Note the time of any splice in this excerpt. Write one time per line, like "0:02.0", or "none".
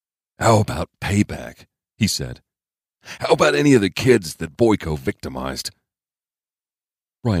none